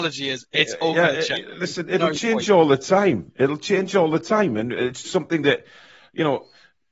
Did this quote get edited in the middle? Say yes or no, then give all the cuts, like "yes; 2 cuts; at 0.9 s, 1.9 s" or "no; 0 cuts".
yes; 1 cut; at 5.0 s